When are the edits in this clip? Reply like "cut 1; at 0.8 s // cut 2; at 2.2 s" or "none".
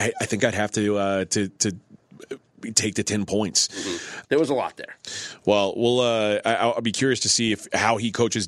cut 1; at 4.2 s